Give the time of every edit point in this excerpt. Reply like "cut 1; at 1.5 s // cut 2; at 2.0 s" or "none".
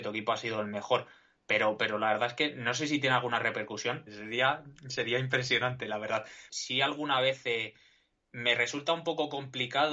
cut 1; at 4.1 s // cut 2; at 6.5 s